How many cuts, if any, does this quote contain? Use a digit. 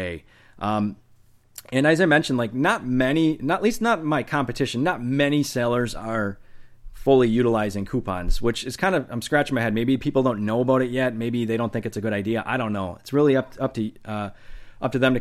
0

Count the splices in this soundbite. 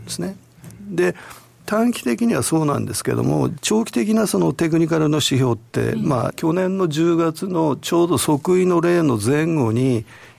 2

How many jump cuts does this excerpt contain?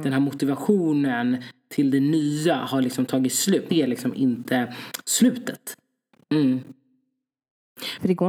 2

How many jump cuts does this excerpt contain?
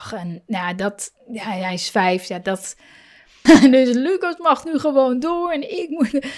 1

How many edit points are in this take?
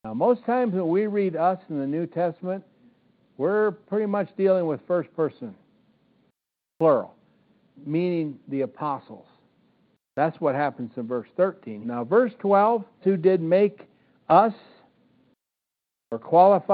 2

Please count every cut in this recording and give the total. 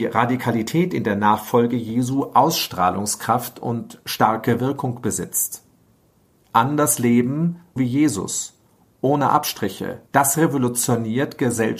2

